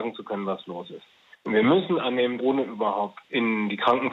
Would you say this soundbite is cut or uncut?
cut